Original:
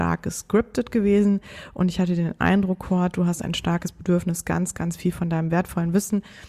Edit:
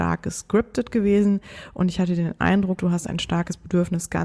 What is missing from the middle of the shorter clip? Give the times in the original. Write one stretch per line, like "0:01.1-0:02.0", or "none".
0:02.8-0:03.1